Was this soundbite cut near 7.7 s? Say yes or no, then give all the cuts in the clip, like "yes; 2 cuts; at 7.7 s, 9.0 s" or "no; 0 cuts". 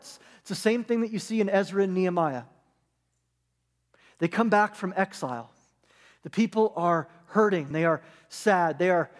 yes; 1 cut; at 7.7 s